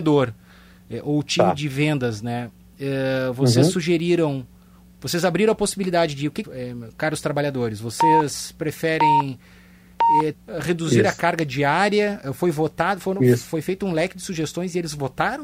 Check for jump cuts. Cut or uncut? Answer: cut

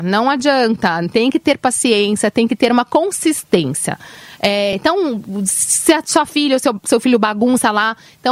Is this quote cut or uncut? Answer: uncut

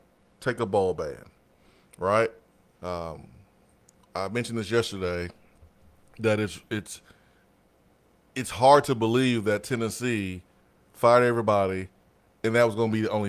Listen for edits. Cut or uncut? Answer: cut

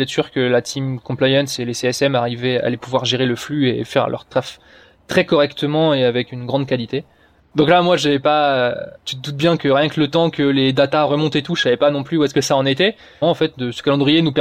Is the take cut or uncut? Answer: cut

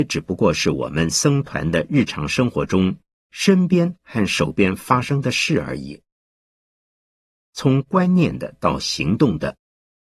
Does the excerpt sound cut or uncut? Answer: cut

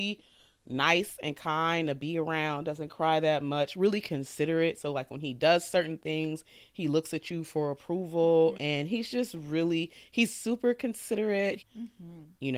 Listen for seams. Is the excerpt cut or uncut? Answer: cut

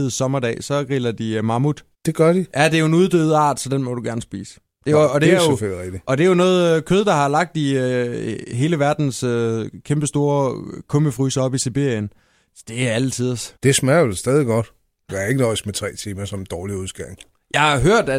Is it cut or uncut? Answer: cut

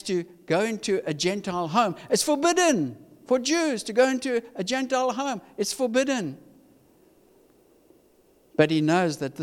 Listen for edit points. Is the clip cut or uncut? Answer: uncut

